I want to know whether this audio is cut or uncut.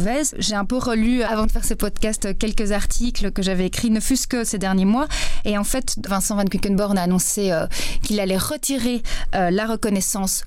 cut